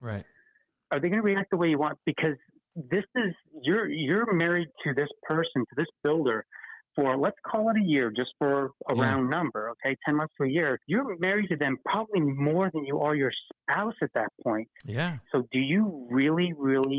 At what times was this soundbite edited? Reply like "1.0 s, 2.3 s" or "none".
10.8 s, 15.3 s

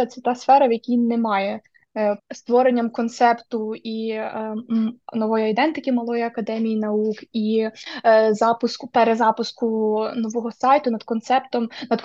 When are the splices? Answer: 2.2 s

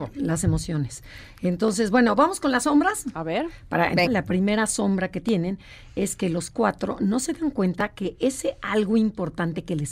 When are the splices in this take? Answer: 4.1 s

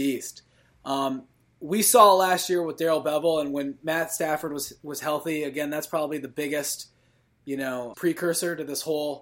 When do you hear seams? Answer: 7.9 s

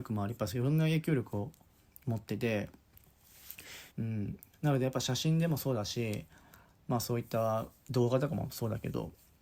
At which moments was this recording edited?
3.9 s

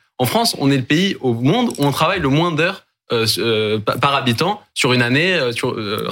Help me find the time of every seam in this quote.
none

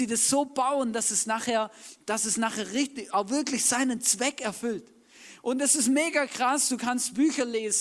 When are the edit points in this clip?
none

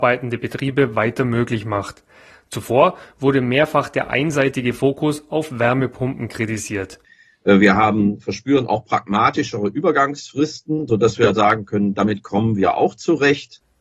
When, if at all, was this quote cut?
none

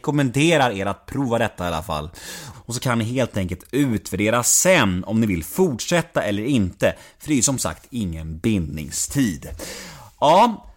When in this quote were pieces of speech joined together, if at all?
2.5 s

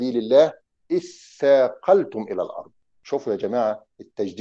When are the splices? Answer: 2.9 s

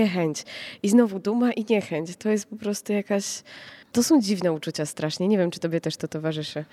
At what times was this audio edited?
3.8 s

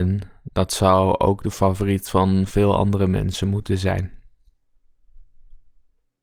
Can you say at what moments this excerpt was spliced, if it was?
none

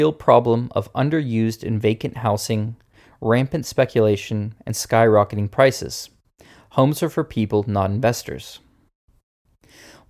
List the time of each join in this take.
none

